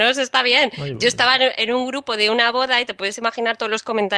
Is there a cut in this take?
no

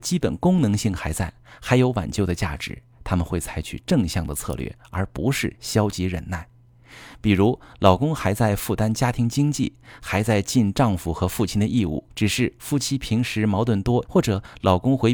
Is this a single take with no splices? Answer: no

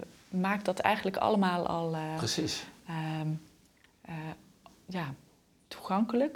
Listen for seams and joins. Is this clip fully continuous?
yes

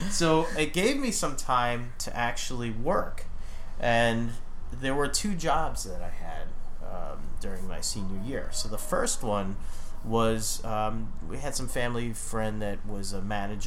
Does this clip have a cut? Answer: no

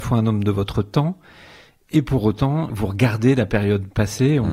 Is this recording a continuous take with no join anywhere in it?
no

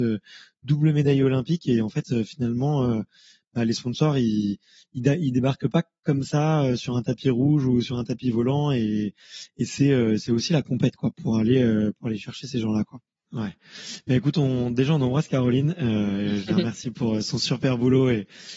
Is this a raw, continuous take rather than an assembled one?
no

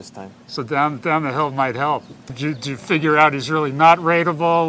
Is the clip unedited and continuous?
no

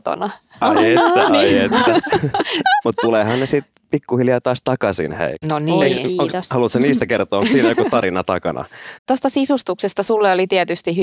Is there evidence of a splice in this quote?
yes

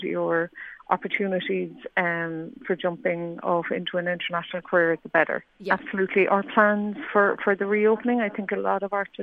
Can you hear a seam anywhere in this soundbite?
yes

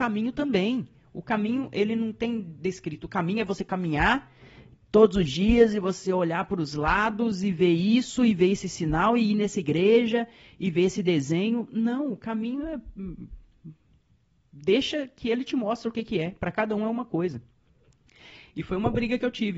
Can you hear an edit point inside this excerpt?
no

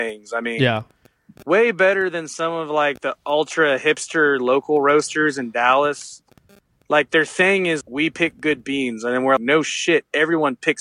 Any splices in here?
yes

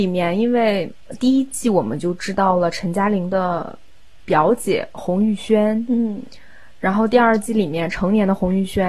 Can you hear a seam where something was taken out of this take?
no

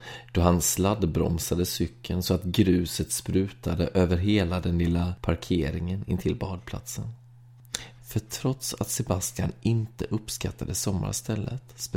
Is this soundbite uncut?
no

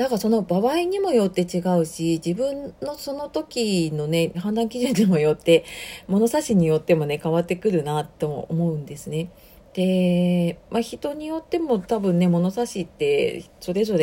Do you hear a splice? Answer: yes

